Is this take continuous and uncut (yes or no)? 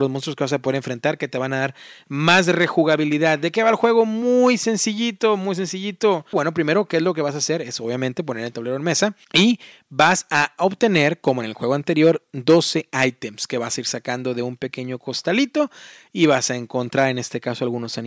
no